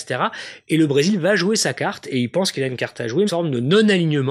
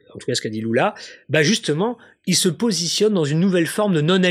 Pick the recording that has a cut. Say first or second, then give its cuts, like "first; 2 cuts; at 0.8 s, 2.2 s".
first; 1 cut; at 3.3 s